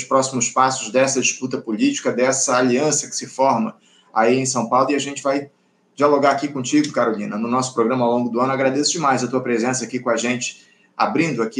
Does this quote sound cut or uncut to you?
uncut